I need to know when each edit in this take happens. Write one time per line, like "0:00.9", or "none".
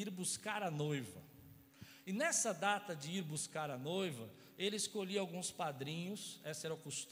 none